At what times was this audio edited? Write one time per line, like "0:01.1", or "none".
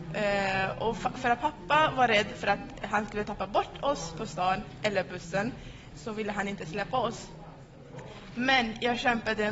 0:05.9